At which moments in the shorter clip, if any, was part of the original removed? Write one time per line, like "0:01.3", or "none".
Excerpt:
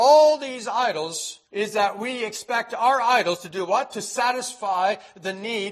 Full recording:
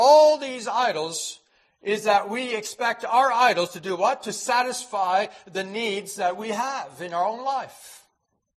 0:01.4